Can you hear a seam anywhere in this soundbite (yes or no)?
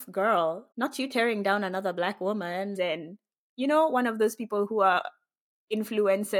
yes